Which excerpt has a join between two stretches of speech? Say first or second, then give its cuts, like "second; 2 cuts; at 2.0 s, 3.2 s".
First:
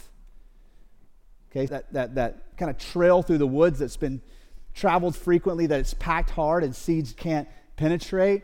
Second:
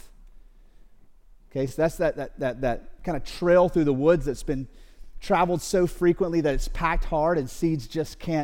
first; 3 cuts; at 1.7 s, 5.1 s, 7.1 s